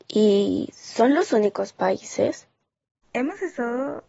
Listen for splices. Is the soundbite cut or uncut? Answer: cut